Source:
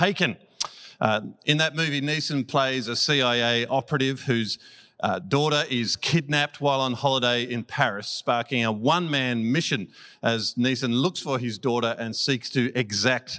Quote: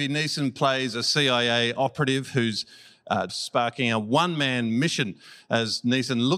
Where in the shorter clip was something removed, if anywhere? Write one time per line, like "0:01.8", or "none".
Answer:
0:03.3